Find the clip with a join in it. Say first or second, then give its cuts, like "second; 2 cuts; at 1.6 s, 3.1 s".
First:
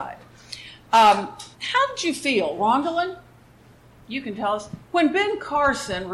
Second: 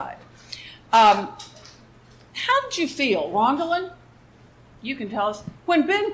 first; 1 cut; at 1.5 s